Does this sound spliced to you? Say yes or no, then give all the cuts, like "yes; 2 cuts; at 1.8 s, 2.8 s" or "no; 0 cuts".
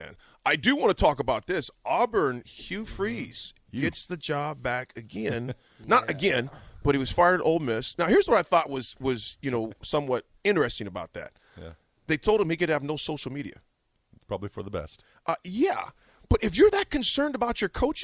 yes; 1 cut; at 10.3 s